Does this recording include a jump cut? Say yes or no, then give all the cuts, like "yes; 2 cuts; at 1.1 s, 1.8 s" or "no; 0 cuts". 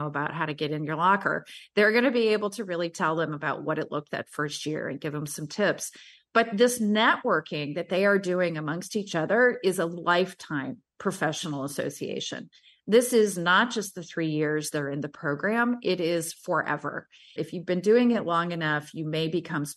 yes; 2 cuts; at 4.1 s, 17.4 s